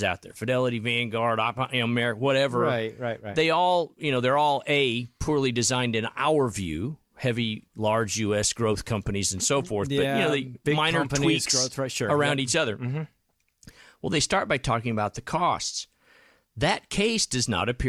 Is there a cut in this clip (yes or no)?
no